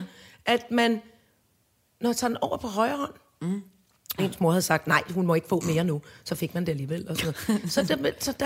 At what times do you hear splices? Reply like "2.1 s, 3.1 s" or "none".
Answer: 4.2 s